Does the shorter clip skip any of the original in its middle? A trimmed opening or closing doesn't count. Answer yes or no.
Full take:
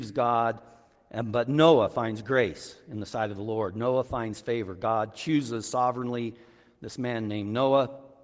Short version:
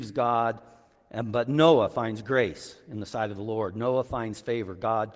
no